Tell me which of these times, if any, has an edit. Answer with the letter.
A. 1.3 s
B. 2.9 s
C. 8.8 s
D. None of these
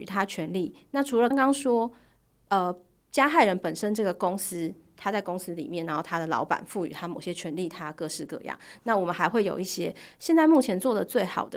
A